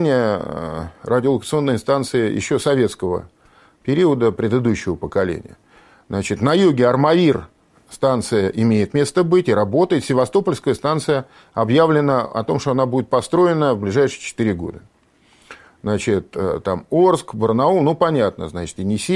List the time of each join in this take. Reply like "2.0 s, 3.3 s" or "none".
none